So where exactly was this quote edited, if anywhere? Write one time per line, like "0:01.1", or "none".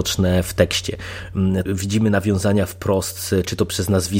0:01.7